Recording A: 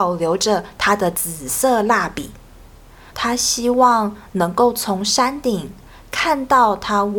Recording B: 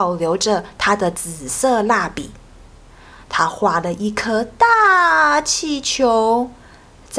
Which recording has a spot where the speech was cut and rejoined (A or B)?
A